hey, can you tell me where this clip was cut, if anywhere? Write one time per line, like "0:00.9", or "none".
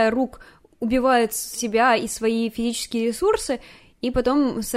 none